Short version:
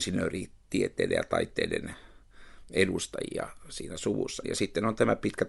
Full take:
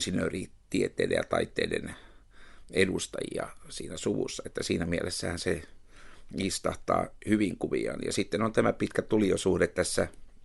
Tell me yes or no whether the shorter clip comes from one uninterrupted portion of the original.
no